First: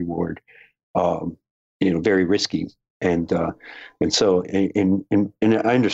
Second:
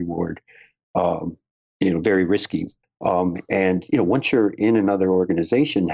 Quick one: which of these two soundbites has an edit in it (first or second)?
second